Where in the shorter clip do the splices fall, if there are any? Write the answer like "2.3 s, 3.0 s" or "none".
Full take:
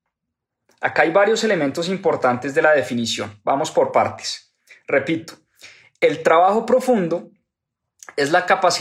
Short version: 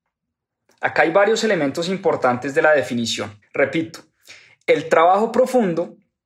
3.4 s